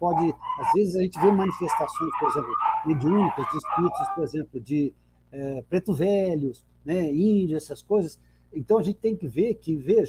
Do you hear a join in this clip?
no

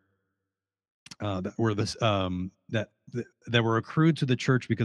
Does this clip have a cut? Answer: no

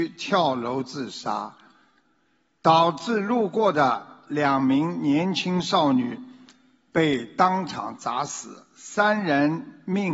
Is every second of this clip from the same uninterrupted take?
yes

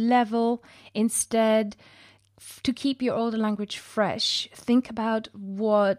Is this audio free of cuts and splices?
yes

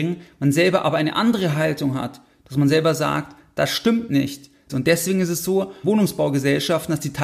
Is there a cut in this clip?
yes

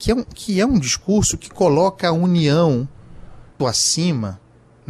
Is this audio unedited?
no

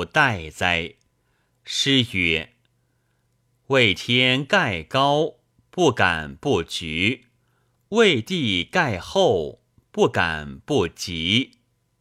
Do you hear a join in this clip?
yes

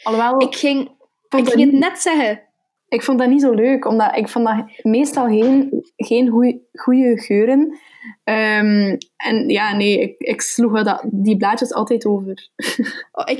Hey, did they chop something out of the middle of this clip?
yes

